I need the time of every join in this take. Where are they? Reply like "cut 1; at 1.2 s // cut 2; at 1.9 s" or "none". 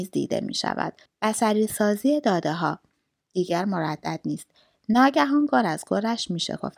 cut 1; at 1.1 s